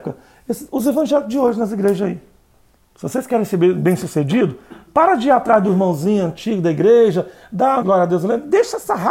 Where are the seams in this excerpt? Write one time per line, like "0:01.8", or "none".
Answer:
0:02.8
0:07.8